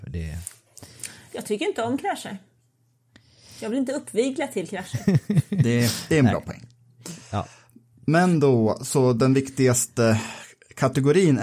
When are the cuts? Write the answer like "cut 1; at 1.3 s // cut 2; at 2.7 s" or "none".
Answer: none